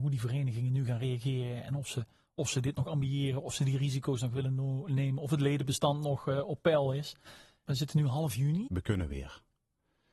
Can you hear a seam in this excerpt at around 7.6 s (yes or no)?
yes